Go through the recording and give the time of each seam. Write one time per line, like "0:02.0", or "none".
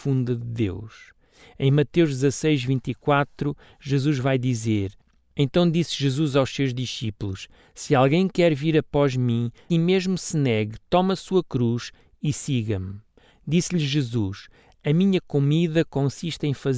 0:09.7
0:13.3